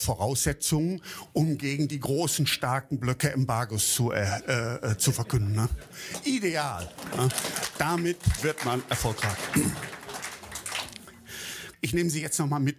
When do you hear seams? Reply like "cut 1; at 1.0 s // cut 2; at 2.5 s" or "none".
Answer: cut 1; at 11.7 s